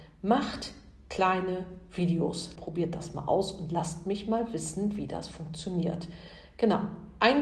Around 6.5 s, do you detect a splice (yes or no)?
no